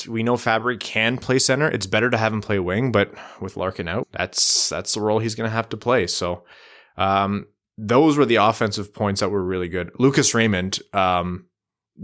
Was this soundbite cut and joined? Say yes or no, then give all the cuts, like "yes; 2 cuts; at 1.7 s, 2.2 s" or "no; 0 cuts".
yes; 1 cut; at 4.0 s